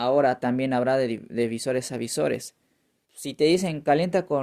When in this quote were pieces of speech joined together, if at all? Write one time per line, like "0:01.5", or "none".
0:03.0